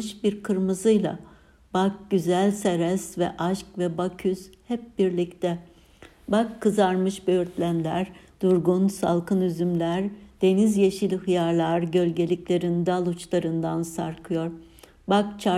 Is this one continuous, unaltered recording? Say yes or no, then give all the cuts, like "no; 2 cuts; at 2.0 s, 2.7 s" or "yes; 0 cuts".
yes; 0 cuts